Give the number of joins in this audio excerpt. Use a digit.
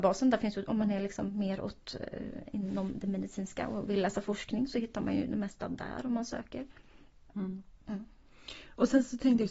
0